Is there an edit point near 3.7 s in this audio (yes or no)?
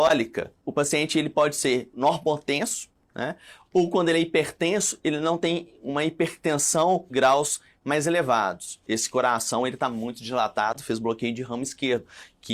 no